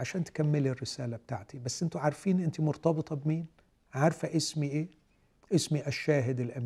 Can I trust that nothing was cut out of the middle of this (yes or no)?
yes